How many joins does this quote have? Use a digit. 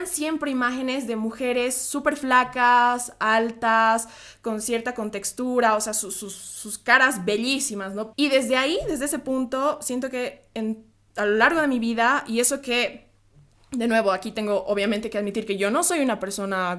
1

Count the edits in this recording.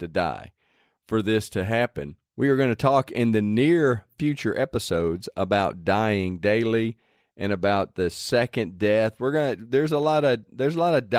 0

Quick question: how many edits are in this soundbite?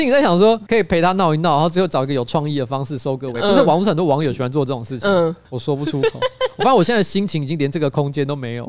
0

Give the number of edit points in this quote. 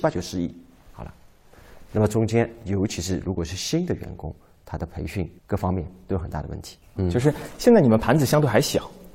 2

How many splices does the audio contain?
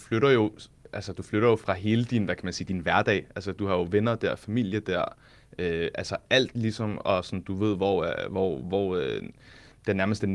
0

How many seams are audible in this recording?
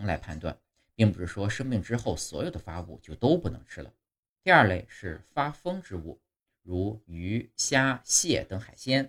1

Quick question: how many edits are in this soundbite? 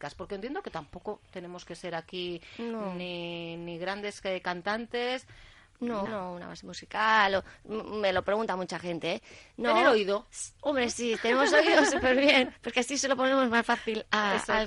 1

